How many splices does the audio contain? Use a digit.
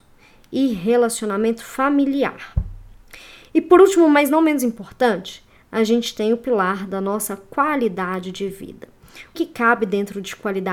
1